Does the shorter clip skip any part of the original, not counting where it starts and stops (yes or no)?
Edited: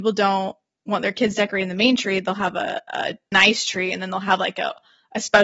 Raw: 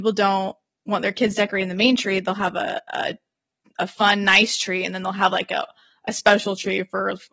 yes